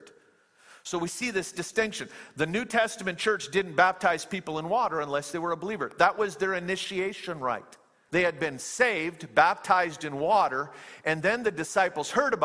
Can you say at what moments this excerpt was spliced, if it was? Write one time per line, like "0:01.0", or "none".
0:08.1

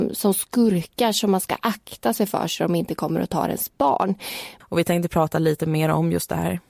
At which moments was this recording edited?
0:04.6

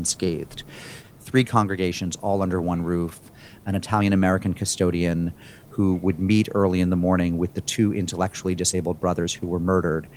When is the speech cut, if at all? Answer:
0:01.0

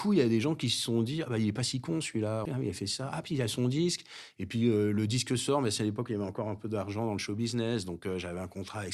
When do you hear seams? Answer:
0:02.5

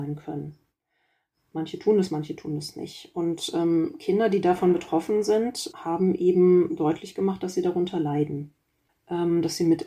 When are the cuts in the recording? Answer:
none

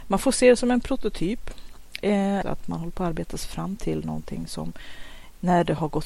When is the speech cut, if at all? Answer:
0:02.4

